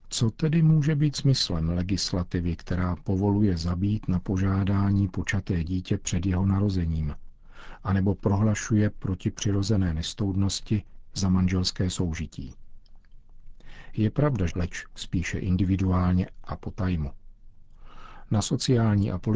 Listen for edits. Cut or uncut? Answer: cut